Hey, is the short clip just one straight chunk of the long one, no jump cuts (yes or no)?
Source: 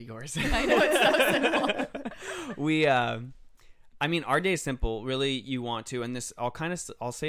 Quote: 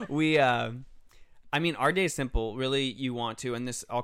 yes